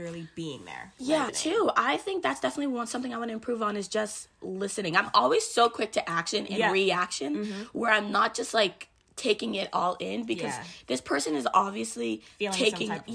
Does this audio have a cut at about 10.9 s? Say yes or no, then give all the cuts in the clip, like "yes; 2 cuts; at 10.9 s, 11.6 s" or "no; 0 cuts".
no; 1 cut; at 1.3 s